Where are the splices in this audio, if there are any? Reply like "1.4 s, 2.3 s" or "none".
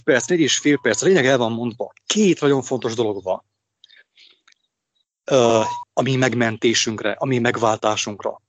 5.8 s